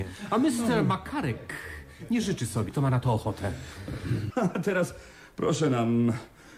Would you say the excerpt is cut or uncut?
cut